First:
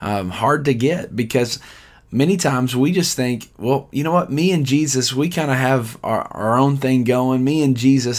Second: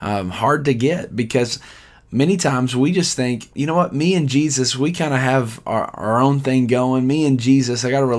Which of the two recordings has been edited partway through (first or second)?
second